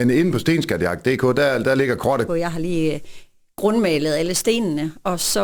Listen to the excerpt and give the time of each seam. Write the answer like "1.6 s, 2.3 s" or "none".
2.3 s